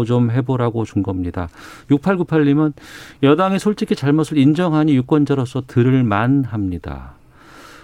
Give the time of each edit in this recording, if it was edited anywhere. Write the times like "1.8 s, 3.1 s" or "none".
1.8 s